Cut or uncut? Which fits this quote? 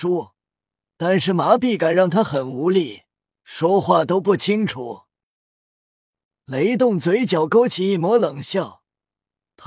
cut